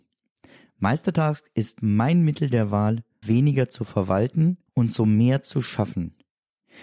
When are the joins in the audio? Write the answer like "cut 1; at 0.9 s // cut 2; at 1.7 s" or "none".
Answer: cut 1; at 3.2 s // cut 2; at 4.7 s